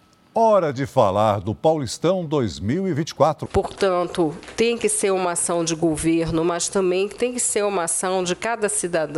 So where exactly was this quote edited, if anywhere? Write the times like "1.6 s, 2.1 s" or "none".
3.5 s